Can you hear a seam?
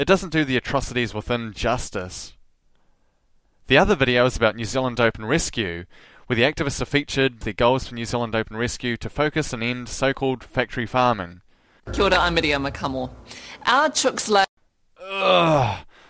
yes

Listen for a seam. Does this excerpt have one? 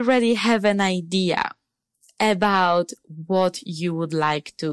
no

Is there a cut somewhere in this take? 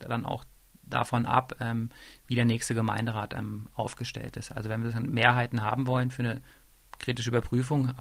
no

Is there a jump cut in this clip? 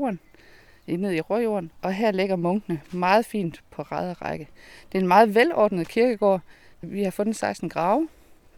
yes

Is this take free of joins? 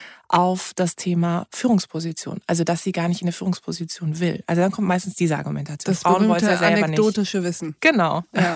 yes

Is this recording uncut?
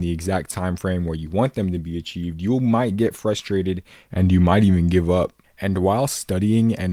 yes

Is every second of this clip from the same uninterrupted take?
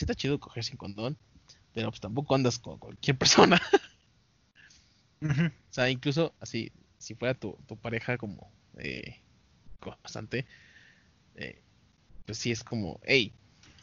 yes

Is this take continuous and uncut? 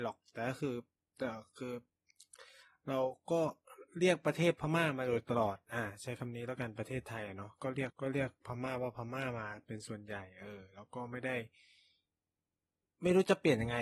no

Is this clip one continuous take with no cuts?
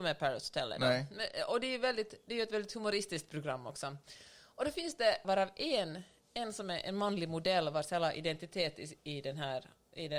no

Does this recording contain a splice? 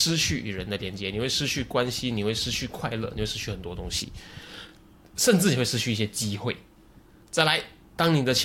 no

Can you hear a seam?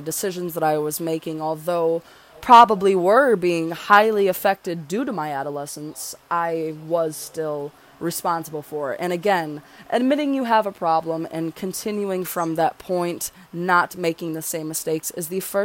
no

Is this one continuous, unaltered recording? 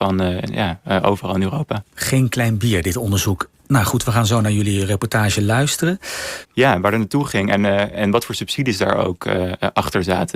no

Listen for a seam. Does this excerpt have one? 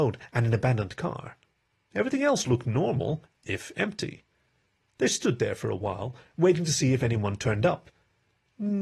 no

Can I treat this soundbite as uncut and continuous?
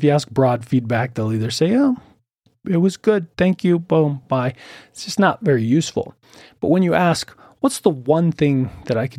yes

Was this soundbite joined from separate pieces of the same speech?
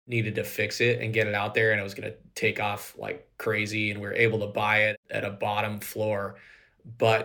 no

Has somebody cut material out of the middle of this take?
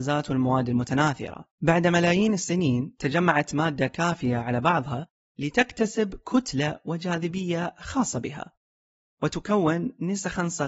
yes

